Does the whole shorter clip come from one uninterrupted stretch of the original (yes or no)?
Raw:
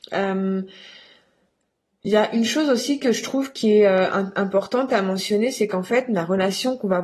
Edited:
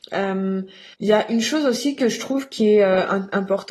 no